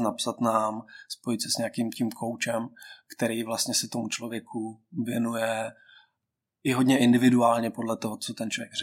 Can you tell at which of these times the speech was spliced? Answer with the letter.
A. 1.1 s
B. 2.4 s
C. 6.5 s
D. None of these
D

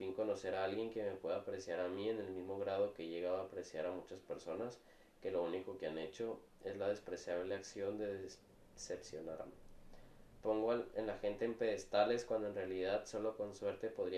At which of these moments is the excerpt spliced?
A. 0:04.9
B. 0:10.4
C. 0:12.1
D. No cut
B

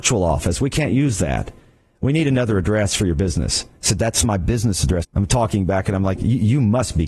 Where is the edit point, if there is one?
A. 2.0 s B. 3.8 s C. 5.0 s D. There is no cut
C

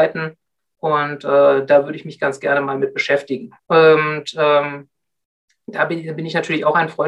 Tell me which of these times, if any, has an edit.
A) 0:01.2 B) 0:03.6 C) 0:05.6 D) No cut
B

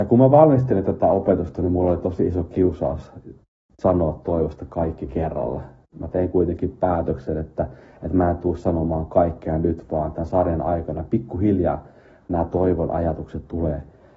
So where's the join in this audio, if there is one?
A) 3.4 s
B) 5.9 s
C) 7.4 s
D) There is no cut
D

